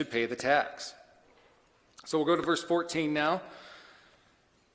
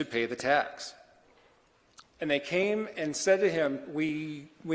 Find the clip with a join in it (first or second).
second